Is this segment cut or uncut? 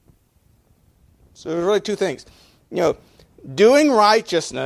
uncut